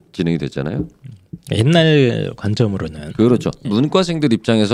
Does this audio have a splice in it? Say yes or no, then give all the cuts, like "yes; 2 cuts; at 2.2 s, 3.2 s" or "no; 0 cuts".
yes; 2 cuts; at 1.4 s, 3.6 s